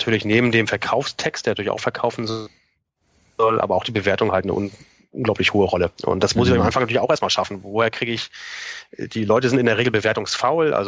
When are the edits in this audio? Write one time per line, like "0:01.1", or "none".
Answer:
none